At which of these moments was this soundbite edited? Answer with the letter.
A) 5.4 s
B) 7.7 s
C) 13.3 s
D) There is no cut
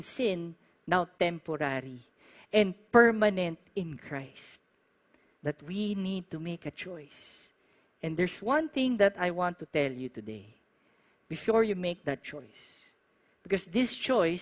A